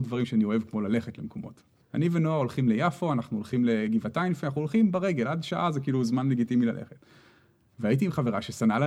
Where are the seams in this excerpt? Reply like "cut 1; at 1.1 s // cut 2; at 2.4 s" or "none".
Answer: cut 1; at 1.8 s